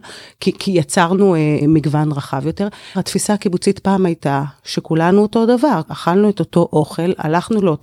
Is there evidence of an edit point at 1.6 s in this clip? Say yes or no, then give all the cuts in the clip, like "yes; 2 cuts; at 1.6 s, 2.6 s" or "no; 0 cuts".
yes; 3 cuts; at 1.6 s, 2.9 s, 5.9 s